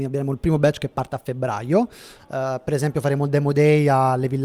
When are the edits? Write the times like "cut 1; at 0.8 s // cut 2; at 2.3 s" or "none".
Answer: cut 1; at 2.2 s